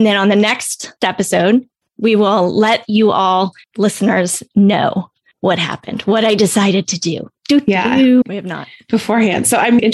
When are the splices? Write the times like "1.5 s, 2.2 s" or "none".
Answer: 1.8 s, 8.2 s

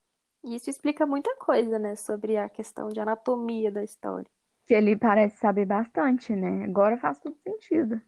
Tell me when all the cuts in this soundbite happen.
none

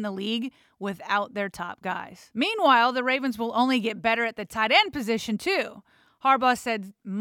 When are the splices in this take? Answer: none

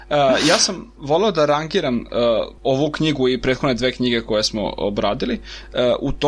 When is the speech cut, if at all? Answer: 2.6 s

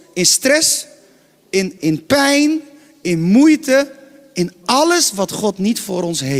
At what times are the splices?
1.8 s

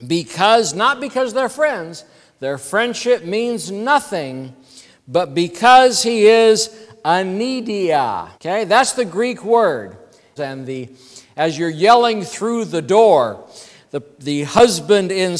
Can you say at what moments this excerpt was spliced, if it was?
8.3 s, 10.4 s

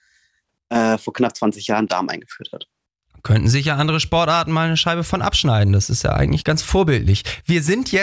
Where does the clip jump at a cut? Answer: 1.9 s, 6.4 s

